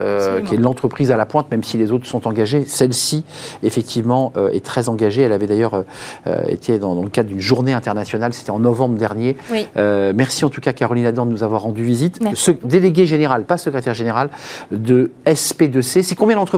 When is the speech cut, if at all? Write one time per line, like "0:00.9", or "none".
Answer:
none